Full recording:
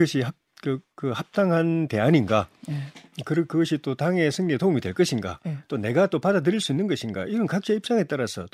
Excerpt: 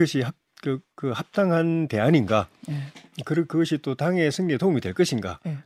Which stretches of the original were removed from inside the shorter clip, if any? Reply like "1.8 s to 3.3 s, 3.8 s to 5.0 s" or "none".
none